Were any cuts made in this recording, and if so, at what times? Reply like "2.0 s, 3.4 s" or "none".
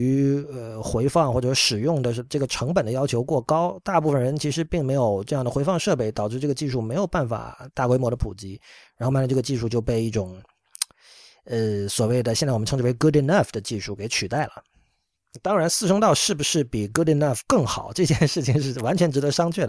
9.1 s